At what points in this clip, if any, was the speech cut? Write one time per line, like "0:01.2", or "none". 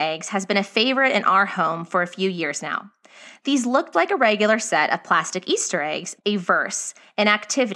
0:03.9
0:06.2